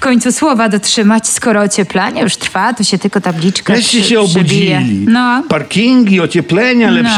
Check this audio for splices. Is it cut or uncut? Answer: uncut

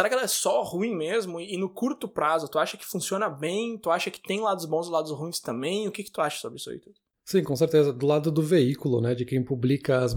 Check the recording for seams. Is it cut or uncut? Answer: uncut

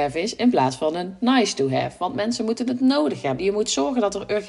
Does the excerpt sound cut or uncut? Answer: cut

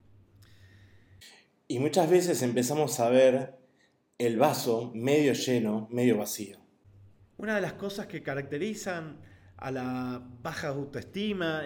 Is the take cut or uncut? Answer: uncut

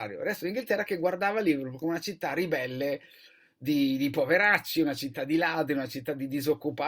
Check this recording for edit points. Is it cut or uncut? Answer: uncut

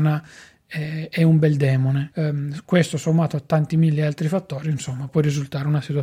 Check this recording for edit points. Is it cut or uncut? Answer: cut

